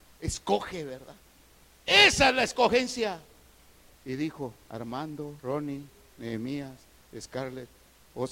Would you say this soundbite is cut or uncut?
cut